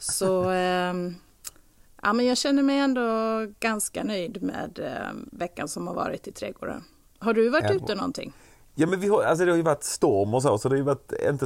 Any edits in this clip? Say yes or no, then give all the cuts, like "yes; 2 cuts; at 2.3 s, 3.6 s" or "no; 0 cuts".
no; 0 cuts